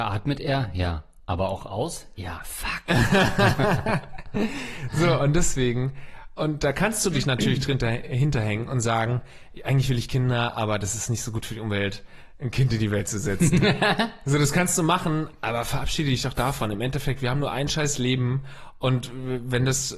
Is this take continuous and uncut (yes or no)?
yes